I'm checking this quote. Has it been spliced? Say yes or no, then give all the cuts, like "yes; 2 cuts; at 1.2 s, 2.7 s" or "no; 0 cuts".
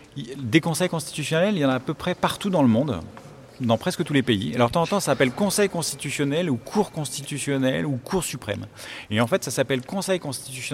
no; 0 cuts